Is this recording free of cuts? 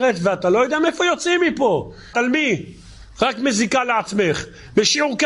no; 1 cut; at 2.1 s

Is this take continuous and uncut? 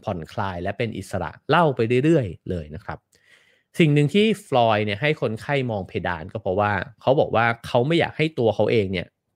yes; 0 cuts

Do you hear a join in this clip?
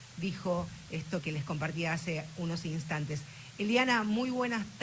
yes; 1 cut; at 1.2 s

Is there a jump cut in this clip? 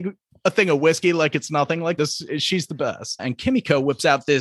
yes; 2 cuts; at 2.0 s, 3.2 s

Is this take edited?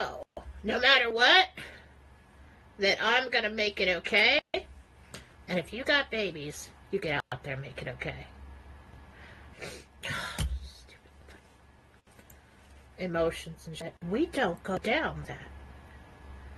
yes; 3 cuts; at 9.5 s, 14.0 s, 15.2 s

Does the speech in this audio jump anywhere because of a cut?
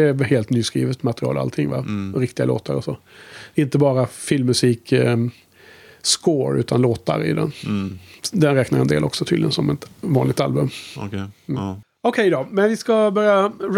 no; 0 cuts

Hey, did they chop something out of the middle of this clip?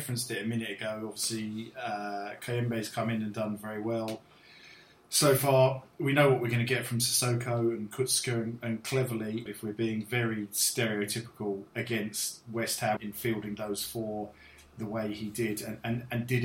yes; 2 cuts; at 9.5 s, 13.0 s

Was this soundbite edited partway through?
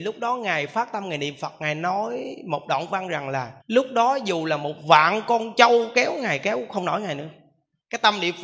yes; 1 cut; at 3.6 s

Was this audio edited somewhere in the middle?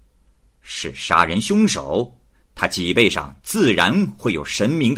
no; 0 cuts

